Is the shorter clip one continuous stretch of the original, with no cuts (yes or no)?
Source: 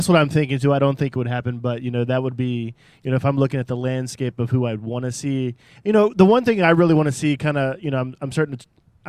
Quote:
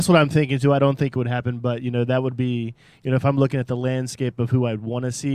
yes